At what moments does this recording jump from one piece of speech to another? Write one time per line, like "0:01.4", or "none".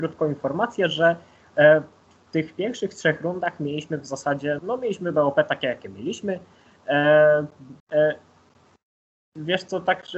0:04.6
0:07.8